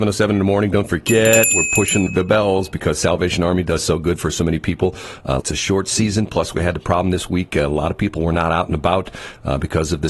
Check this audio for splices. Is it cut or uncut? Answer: cut